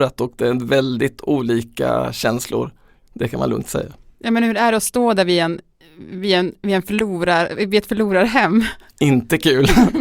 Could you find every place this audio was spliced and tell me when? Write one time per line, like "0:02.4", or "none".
none